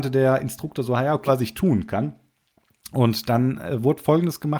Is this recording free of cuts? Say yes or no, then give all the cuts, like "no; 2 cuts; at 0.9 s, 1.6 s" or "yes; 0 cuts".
no; 1 cut; at 1.3 s